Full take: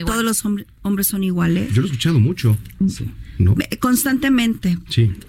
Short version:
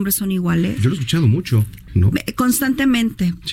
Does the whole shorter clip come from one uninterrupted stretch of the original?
no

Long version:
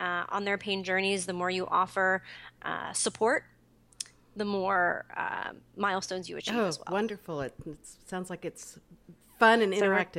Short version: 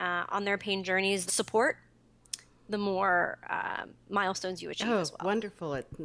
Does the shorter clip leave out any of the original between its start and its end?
yes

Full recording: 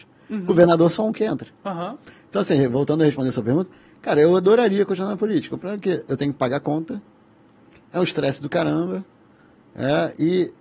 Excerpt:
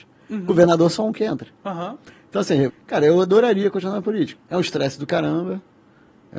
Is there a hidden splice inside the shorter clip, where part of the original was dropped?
yes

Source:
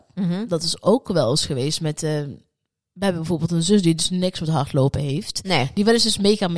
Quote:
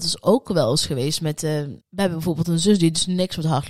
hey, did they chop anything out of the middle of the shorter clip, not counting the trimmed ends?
yes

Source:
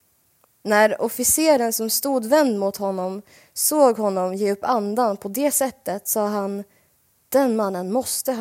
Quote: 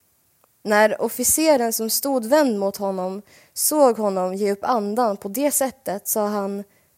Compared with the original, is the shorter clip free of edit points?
yes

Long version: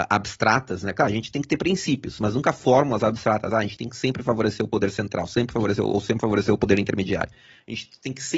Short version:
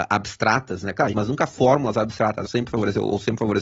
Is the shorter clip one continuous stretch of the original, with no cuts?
no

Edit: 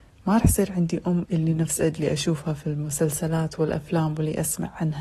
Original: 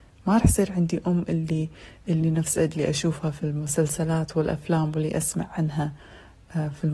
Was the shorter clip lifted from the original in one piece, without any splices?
no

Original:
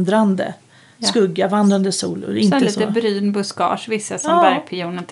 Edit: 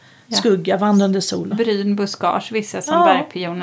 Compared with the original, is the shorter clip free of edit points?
no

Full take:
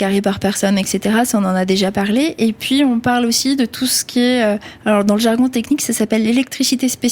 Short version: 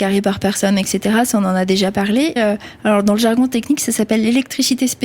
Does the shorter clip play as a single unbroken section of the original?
no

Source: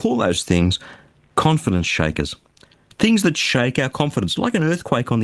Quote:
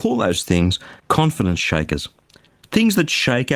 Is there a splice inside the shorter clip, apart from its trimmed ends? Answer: yes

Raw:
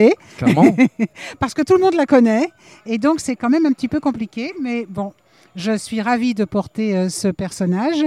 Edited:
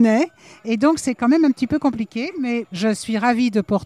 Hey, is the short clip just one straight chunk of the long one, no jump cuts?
no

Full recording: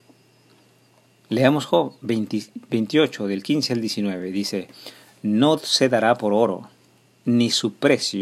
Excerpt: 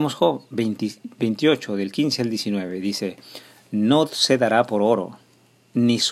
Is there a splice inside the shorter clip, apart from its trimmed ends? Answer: no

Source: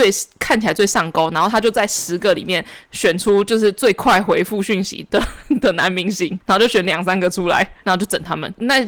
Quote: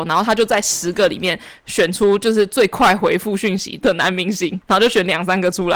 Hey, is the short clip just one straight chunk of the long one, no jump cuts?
no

